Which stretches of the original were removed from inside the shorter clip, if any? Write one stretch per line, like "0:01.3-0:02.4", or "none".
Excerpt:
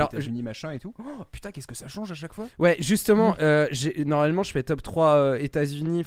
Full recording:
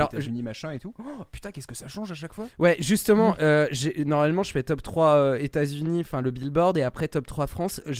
none